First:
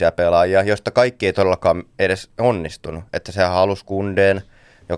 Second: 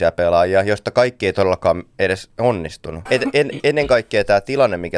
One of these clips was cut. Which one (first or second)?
second